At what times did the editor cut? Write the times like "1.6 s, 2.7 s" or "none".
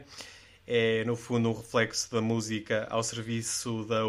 none